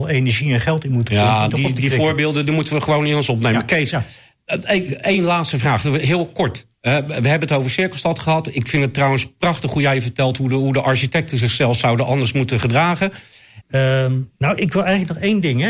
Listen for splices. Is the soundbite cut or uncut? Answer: cut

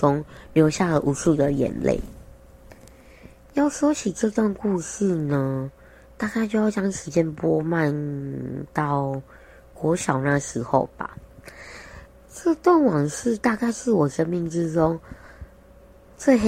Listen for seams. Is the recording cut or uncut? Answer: uncut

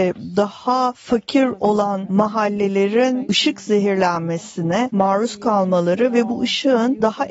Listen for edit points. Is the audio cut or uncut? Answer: uncut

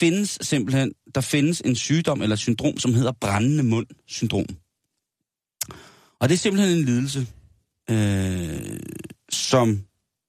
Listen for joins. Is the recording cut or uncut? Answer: uncut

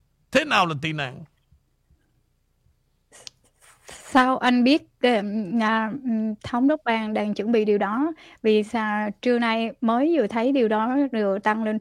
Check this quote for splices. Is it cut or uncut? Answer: uncut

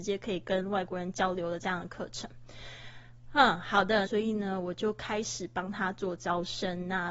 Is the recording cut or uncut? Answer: cut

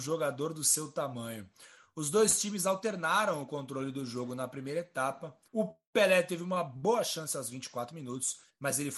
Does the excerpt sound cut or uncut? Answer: cut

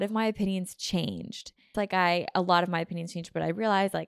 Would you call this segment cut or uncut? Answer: cut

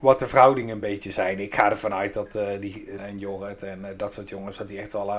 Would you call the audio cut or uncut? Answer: cut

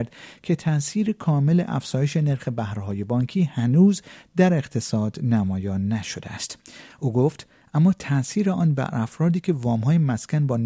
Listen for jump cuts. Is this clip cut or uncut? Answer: cut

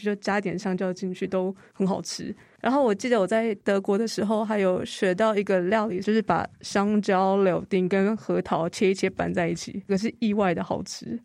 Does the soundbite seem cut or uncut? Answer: cut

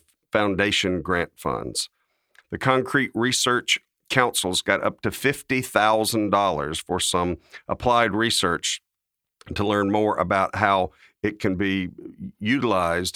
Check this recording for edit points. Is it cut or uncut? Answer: cut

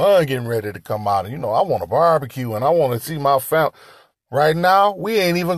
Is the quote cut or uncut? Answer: cut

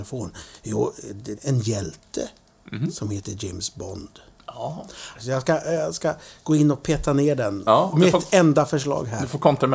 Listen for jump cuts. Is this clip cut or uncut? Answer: cut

